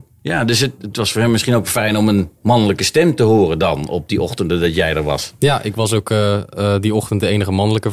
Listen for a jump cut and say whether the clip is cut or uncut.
cut